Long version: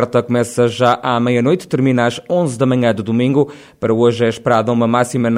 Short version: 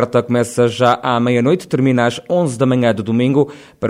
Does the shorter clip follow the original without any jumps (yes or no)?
yes